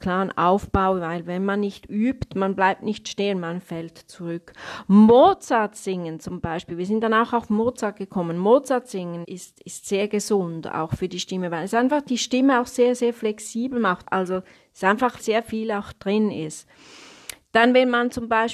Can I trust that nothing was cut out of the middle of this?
no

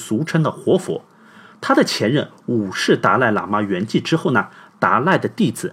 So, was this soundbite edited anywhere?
no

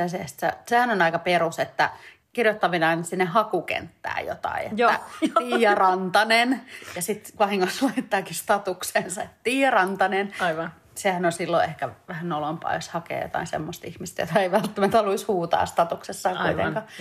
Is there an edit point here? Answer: no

